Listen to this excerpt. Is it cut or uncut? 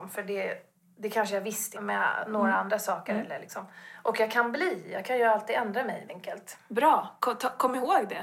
cut